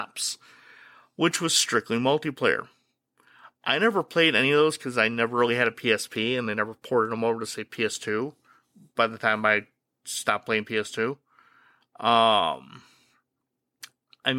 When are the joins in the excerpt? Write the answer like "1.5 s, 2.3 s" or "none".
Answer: none